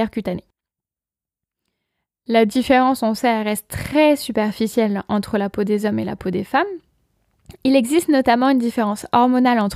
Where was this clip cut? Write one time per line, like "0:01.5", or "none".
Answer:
none